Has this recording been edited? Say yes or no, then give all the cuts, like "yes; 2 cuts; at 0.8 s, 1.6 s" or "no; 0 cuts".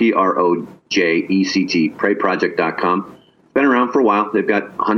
no; 0 cuts